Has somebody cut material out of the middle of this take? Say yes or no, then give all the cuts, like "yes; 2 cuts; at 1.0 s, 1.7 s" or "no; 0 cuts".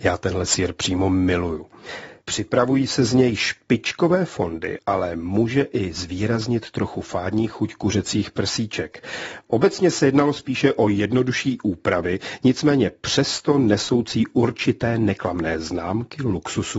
no; 0 cuts